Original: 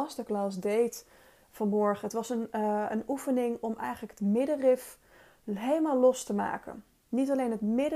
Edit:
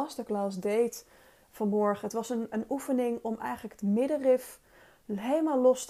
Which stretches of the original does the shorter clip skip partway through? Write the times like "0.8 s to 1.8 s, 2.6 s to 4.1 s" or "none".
2.5 s to 2.9 s